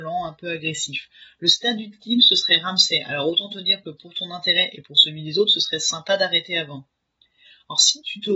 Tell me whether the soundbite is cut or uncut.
uncut